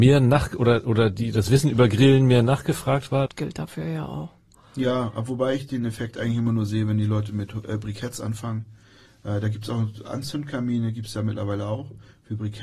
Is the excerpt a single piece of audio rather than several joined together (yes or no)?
no